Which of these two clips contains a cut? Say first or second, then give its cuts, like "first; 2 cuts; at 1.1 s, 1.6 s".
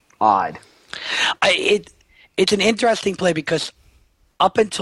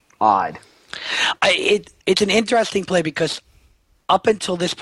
second; 1 cut; at 2.0 s